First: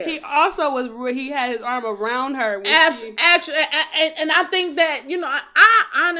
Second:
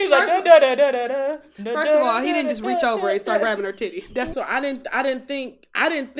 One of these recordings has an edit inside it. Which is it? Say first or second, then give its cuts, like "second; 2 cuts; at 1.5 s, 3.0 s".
second; 1 cut; at 4.3 s